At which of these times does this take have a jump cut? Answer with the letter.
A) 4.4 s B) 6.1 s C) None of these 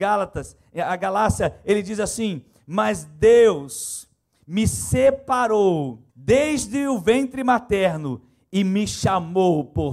B